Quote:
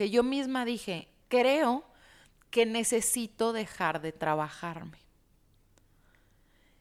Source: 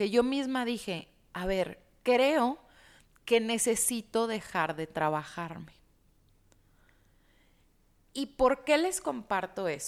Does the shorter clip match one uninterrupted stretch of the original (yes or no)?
no